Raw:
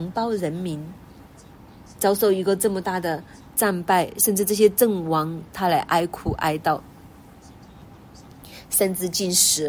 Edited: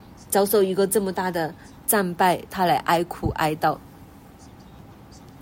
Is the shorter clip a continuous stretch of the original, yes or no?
no